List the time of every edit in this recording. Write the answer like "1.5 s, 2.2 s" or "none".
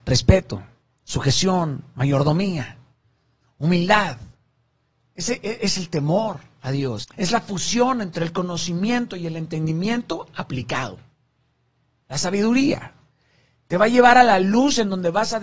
7.0 s

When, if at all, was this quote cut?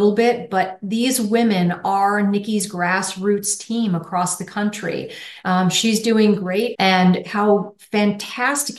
5.4 s, 6.7 s

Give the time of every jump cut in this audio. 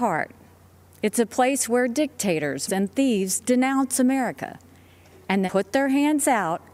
2.7 s, 5.5 s

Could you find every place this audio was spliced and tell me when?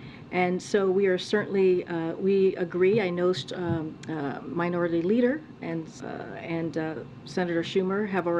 6.0 s

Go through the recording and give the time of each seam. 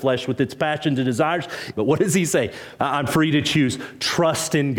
1.7 s, 2.8 s

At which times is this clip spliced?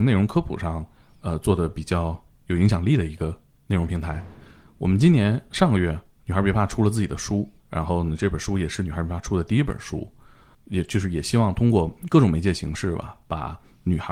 7.6 s, 10.5 s

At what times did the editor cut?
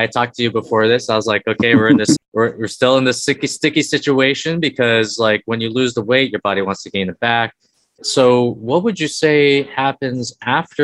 2.2 s

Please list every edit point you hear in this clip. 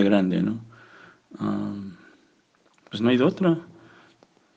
none

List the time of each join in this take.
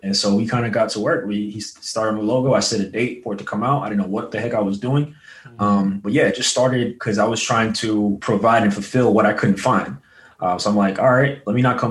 none

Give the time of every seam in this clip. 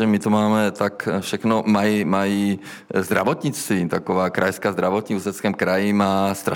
none

